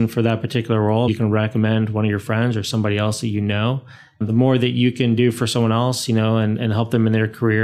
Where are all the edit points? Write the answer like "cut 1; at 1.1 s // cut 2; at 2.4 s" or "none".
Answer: cut 1; at 1.1 s